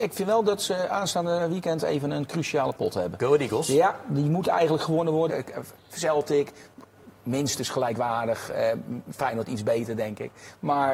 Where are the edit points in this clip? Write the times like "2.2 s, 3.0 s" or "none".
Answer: 5.3 s